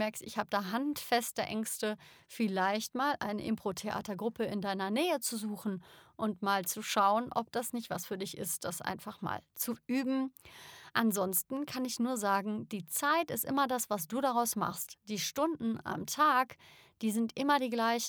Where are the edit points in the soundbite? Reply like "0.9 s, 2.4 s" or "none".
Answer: none